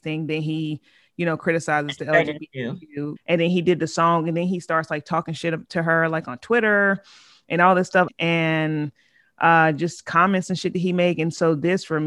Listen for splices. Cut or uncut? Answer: cut